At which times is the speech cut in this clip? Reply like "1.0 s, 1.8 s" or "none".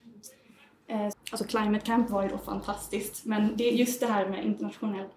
1.1 s